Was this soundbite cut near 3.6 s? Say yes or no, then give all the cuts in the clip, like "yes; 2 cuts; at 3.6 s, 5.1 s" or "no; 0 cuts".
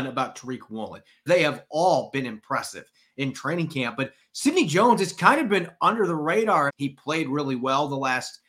no; 2 cuts; at 1.3 s, 6.7 s